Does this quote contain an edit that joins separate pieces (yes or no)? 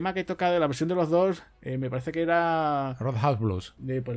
no